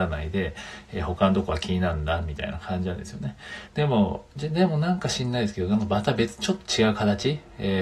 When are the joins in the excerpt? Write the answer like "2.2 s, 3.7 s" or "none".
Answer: 3.7 s